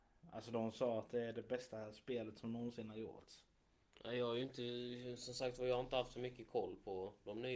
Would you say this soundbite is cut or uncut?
uncut